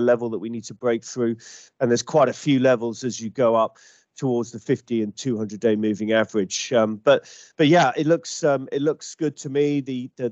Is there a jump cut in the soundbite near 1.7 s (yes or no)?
no